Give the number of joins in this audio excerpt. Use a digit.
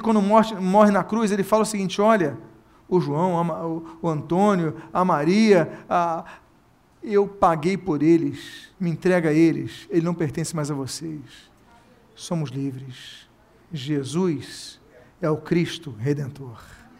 1